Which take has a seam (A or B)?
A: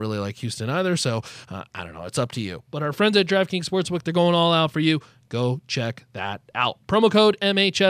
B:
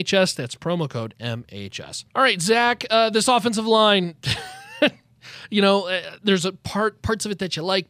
B